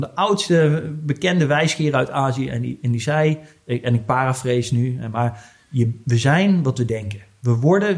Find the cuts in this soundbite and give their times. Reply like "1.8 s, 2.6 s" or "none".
none